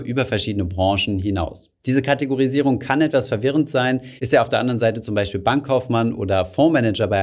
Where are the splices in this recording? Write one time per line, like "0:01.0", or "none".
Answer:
0:01.8
0:04.2